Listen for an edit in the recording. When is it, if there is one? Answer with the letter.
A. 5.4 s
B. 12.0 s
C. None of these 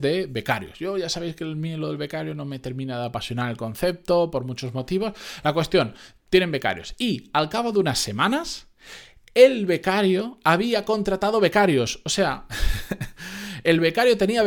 C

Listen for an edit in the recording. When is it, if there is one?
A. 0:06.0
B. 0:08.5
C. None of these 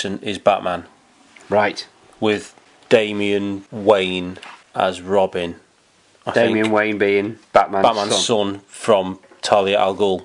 C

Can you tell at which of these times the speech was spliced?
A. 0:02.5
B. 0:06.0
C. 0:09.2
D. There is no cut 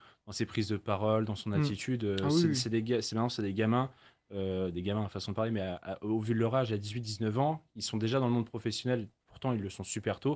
D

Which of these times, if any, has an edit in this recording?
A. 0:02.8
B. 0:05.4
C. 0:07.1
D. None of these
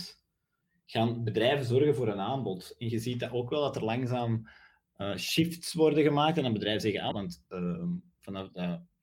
C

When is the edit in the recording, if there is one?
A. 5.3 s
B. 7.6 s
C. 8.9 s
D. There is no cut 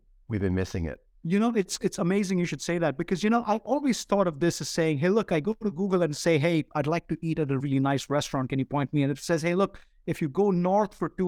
B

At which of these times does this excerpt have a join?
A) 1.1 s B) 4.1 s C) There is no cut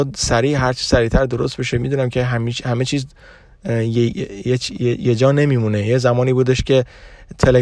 B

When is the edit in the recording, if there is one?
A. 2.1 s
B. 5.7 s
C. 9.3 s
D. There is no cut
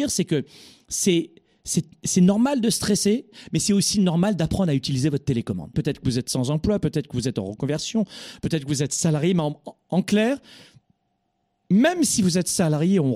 B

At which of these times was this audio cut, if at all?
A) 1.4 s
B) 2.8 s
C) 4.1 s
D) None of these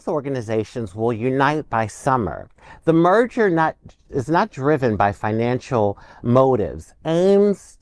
C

